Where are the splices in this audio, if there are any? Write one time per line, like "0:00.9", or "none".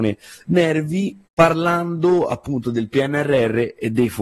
0:01.3